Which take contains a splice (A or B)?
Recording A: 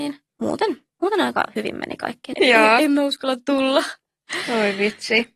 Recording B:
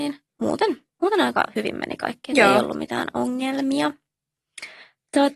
A